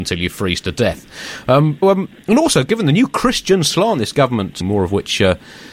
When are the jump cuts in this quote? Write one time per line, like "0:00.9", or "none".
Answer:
0:01.8
0:04.6